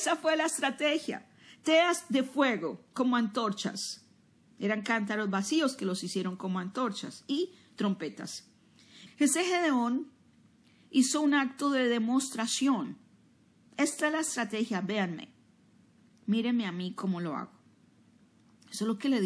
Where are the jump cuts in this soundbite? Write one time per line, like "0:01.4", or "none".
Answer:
0:09.1